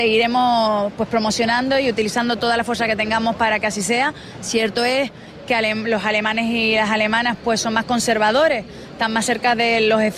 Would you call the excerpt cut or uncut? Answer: uncut